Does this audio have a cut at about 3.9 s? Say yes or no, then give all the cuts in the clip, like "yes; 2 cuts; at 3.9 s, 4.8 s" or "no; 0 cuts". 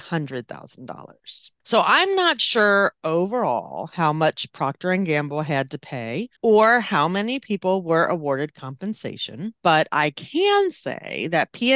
no; 3 cuts; at 1.6 s, 6.4 s, 9.6 s